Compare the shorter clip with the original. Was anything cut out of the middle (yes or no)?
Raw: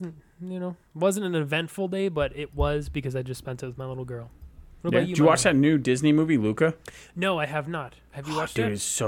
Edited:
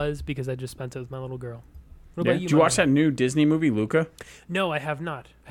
no